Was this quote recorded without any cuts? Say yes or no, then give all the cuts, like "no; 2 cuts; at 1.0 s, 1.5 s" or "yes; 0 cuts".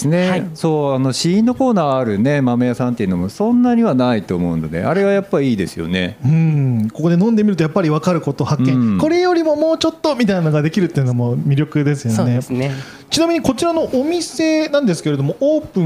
yes; 0 cuts